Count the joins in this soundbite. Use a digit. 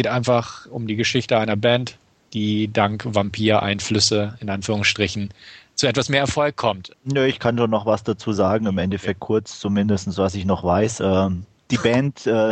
1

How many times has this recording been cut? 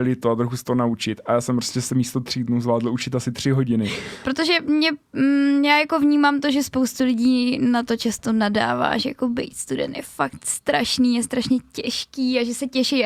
1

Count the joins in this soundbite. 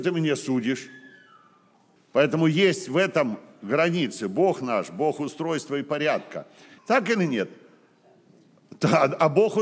1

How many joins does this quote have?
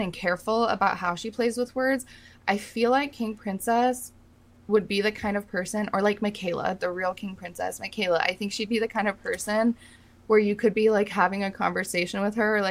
0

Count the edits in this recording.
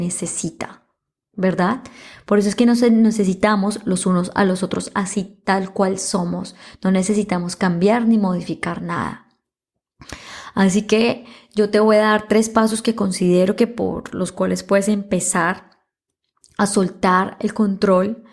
0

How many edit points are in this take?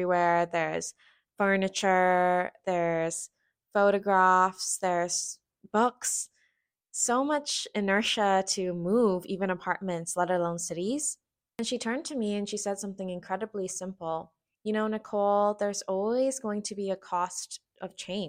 1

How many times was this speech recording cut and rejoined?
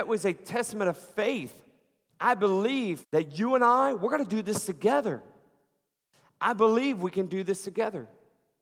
1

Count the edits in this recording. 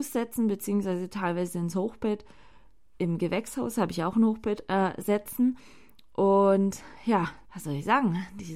1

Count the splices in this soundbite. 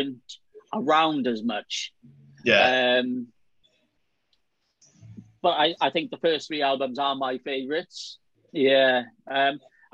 1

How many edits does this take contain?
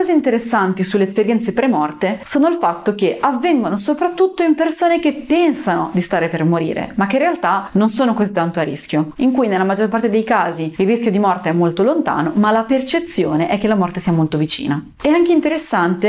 1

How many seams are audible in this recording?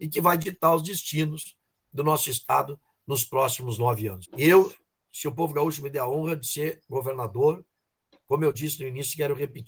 1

